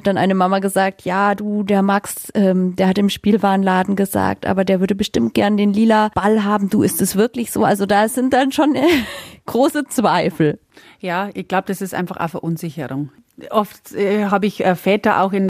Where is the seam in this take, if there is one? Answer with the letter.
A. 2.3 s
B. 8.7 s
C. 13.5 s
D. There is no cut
D